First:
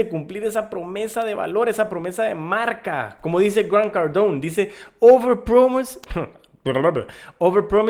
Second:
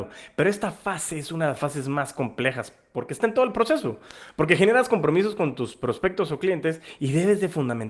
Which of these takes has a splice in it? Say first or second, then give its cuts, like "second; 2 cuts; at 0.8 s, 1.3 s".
first; 1 cut; at 6.1 s